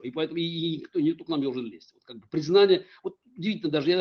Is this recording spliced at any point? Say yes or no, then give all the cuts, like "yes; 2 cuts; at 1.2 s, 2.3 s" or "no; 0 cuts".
no; 0 cuts